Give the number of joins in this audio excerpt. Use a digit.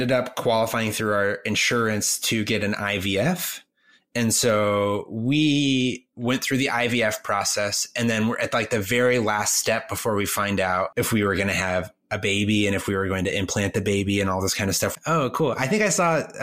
1